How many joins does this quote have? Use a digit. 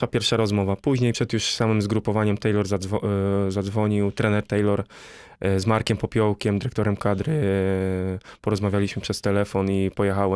0